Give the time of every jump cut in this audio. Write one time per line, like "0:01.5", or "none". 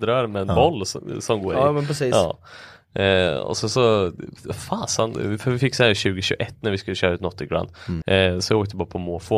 0:08.0